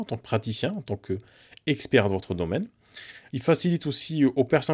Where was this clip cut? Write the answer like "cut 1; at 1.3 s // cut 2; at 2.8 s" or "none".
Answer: cut 1; at 3.3 s